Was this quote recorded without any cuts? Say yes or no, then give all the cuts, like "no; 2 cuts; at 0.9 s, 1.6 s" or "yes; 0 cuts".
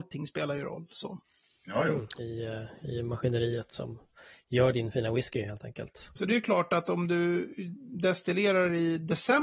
no; 2 cuts; at 2.2 s, 6.2 s